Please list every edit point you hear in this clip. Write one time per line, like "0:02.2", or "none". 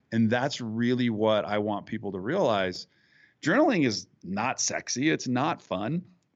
none